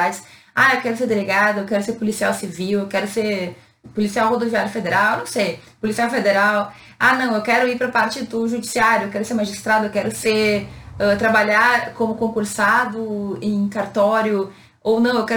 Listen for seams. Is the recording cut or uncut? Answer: uncut